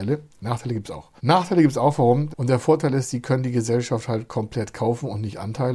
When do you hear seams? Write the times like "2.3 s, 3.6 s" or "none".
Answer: 1.2 s, 2.3 s